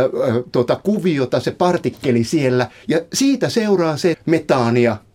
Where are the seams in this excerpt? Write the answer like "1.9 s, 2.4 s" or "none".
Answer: 2.8 s, 4.1 s